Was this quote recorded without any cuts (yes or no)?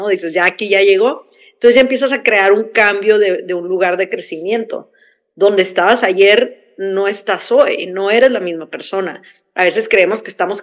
yes